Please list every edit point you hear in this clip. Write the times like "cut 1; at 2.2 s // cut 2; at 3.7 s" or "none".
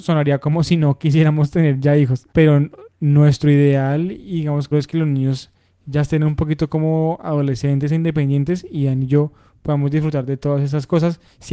cut 1; at 2.3 s // cut 2; at 4.7 s

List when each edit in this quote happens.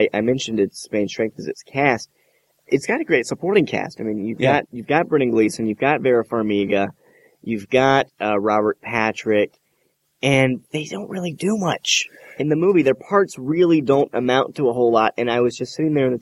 none

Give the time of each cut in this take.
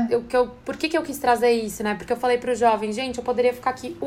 none

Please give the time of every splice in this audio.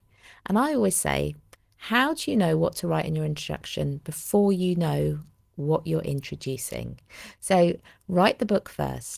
none

